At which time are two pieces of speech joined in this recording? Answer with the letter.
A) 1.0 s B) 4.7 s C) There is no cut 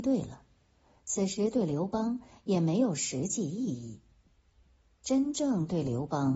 A